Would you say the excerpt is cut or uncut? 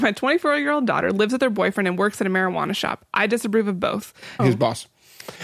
cut